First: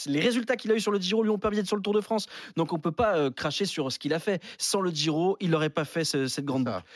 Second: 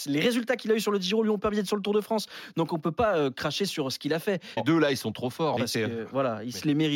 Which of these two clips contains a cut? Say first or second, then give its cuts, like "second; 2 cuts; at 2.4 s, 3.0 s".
second; 2 cuts; at 4.6 s, 5.6 s